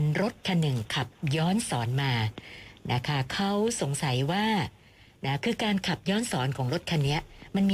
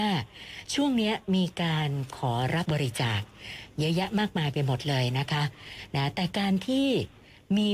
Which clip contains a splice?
second; 1 cut; at 2.7 s

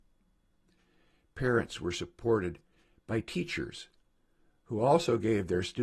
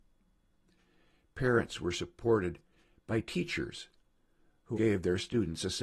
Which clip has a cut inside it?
second; 1 cut; at 4.7 s

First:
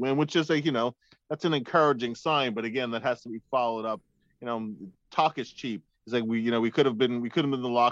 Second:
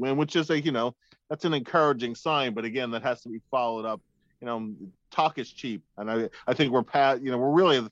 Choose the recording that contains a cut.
first; 1 cut; at 5.9 s

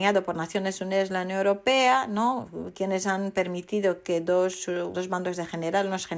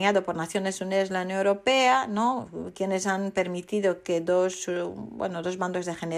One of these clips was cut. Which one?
first; 1 cut; at 4.9 s

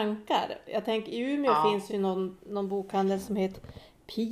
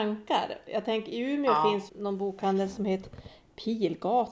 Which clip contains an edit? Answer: second; 1 cut; at 1.9 s

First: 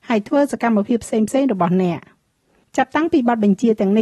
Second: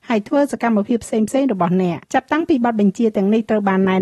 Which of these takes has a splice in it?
second; 1 cut; at 2.0 s

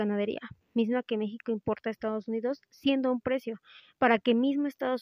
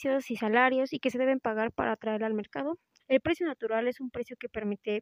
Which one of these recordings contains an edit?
second; 1 cut; at 3.0 s

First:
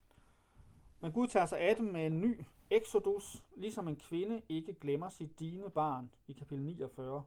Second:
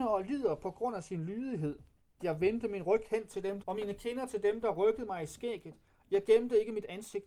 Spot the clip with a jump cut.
second; 2 cuts; at 2.2 s, 3.6 s

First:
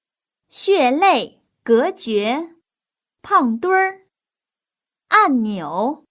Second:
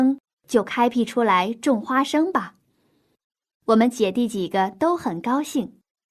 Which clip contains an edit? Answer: first; 2 cuts; at 1.5 s, 3.1 s

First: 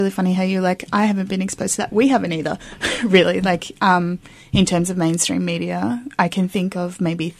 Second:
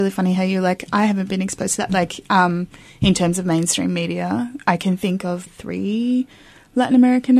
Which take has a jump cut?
second; 2 cuts; at 1.9 s, 5.5 s

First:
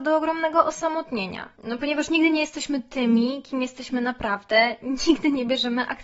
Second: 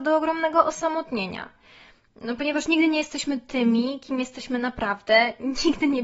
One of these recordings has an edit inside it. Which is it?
first; 1 cut; at 1.5 s

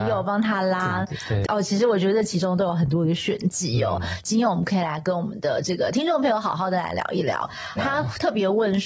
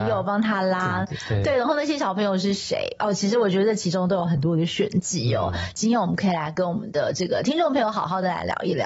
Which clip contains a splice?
first; 2 cuts; at 1.5 s, 7.8 s

